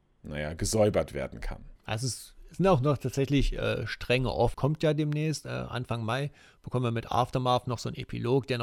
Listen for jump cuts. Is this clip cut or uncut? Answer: cut